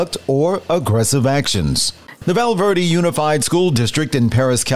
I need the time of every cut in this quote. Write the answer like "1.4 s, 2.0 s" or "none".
2.2 s